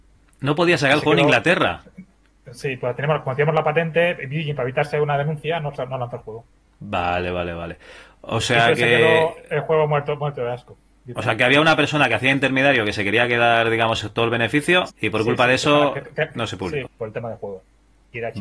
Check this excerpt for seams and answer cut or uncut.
cut